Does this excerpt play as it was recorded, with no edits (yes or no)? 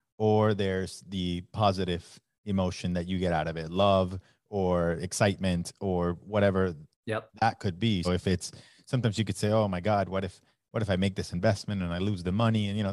no